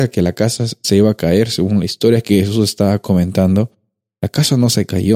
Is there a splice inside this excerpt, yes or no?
no